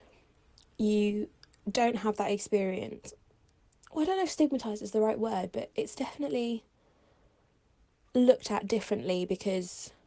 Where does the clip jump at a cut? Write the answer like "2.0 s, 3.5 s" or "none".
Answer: none

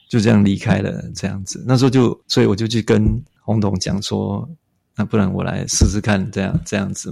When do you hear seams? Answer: none

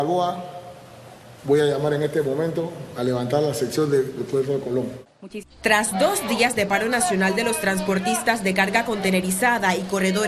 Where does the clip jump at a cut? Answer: 1.4 s, 5.4 s

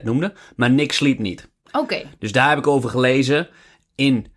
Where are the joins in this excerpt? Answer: none

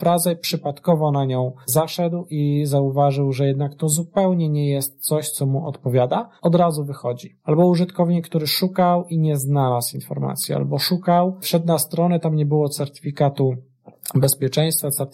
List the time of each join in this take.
none

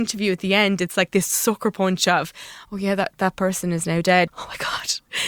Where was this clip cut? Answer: 4.3 s

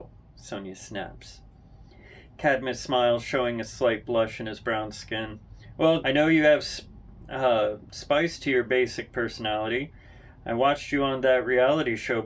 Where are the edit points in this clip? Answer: 6.0 s

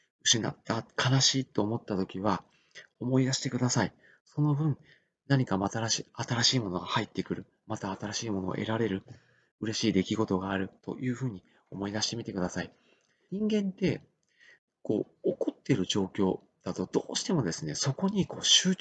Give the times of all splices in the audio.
10.8 s, 13.3 s

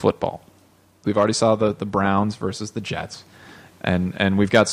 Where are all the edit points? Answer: 1.0 s, 3.7 s

